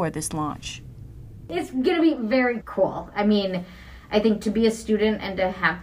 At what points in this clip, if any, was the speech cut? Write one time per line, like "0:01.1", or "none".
0:02.6